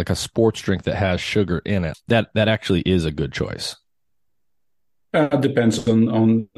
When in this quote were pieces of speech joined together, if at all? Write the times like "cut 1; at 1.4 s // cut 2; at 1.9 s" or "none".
cut 1; at 1.9 s